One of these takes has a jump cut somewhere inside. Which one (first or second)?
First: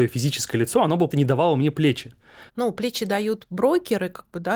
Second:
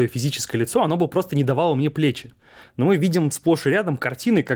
first